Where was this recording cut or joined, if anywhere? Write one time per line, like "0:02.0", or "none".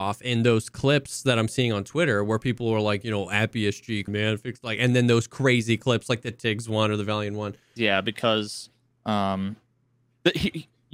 0:04.1
0:07.8